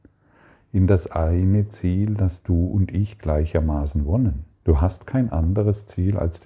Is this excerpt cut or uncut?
cut